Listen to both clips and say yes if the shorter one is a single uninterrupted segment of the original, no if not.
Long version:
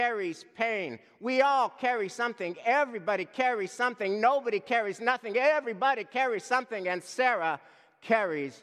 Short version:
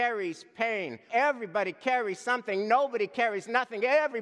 no